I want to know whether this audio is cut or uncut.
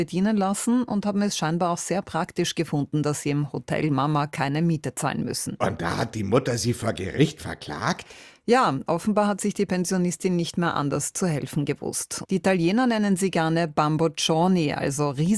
cut